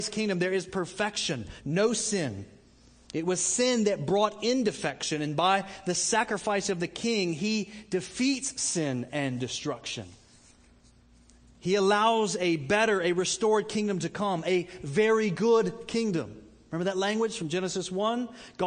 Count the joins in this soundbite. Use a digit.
1